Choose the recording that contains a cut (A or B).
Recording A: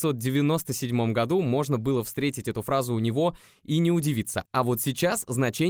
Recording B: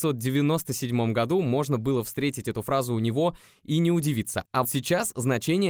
B